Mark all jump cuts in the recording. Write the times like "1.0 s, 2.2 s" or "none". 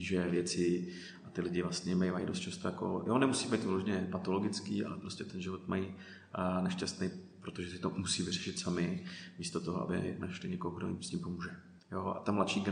11.8 s